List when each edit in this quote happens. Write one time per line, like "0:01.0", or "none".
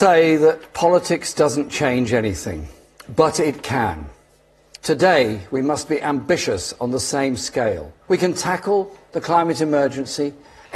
0:04.8
0:08.0